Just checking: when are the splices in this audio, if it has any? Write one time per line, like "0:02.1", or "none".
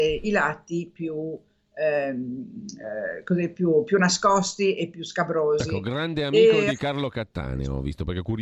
none